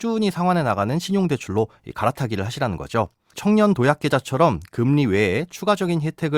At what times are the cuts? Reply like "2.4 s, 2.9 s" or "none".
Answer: 3.3 s